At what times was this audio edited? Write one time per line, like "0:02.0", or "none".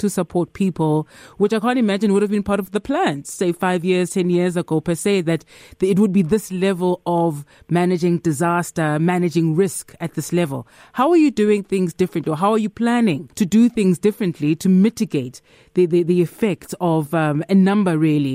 0:13.3